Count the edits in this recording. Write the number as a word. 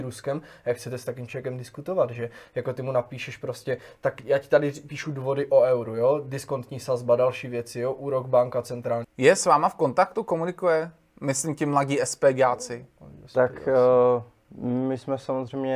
one